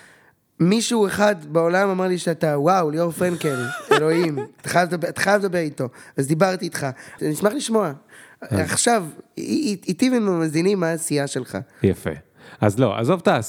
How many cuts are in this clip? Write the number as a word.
one